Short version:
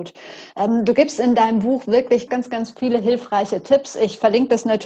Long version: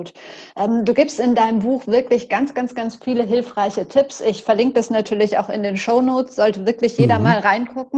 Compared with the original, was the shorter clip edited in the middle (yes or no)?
yes